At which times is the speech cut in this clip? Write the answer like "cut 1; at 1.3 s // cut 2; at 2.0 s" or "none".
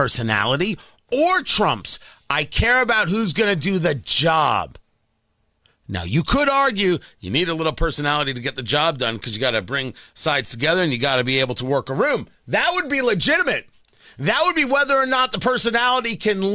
none